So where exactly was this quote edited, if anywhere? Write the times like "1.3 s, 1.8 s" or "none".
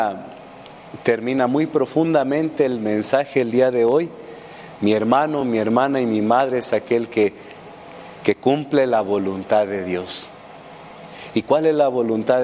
none